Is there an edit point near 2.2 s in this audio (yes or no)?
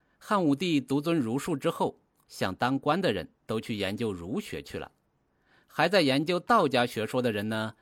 yes